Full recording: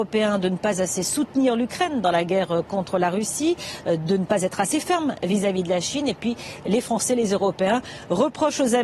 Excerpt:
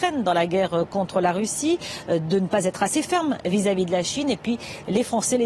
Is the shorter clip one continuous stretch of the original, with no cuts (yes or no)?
yes